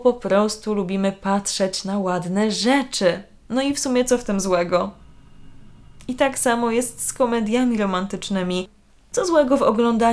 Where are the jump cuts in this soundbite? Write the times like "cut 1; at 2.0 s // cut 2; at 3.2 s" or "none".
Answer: none